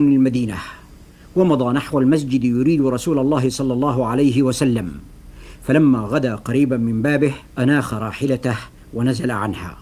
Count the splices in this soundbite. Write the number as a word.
one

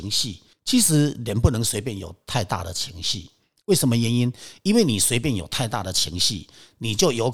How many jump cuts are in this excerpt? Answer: zero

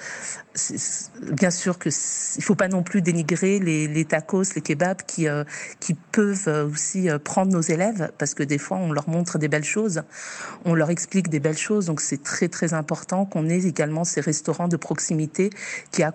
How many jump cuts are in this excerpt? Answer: zero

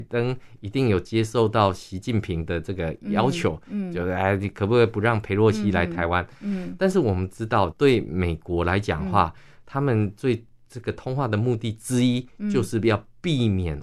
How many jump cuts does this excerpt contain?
one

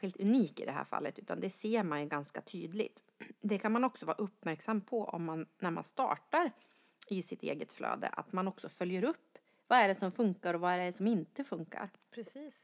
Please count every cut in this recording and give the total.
zero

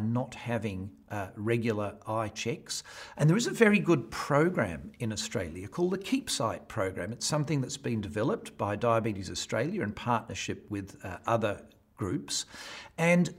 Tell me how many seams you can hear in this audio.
one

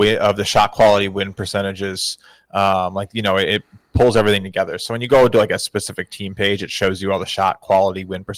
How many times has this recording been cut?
zero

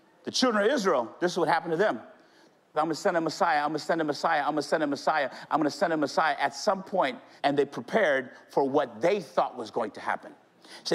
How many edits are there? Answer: two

